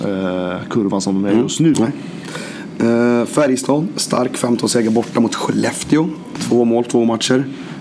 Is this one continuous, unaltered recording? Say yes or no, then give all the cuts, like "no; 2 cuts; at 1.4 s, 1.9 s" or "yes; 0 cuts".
no; 2 cuts; at 1.7 s, 6.3 s